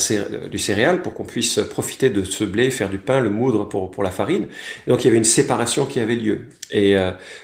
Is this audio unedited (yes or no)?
yes